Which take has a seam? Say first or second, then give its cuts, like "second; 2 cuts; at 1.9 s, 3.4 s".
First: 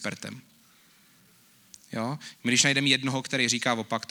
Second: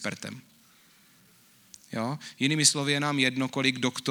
first; 1 cut; at 2.3 s